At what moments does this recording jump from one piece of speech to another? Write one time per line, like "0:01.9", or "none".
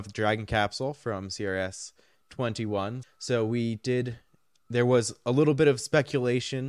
0:03.0